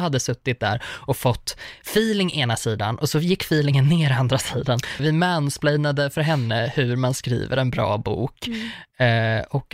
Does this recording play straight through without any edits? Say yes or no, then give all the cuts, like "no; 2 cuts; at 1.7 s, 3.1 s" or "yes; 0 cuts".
no; 1 cut; at 5.0 s